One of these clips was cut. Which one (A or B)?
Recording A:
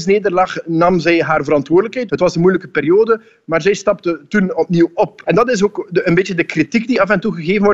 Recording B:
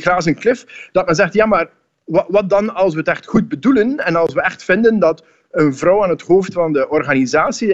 A